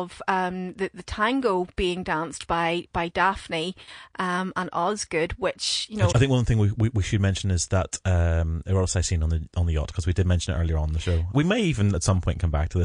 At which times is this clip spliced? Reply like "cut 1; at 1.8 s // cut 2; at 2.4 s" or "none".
cut 1; at 6.1 s // cut 2; at 11.3 s